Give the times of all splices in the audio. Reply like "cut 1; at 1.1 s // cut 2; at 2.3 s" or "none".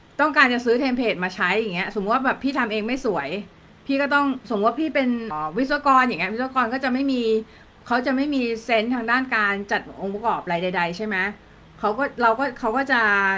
cut 1; at 5.3 s